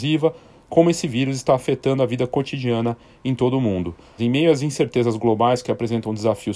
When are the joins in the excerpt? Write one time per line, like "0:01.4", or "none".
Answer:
0:04.2